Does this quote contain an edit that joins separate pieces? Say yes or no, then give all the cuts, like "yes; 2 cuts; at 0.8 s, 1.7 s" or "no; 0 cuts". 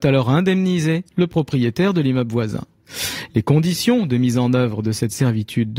yes; 1 cut; at 1.1 s